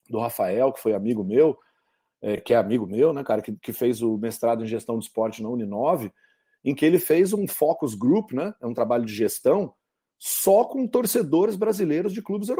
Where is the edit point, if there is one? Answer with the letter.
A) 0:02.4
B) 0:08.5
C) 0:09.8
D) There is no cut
D